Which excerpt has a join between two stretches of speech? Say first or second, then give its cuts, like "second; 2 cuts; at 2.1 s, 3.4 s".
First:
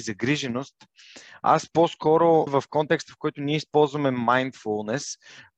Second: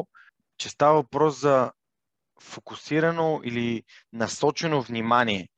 first; 1 cut; at 2.5 s